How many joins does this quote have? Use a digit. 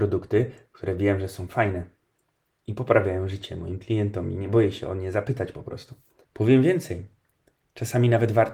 1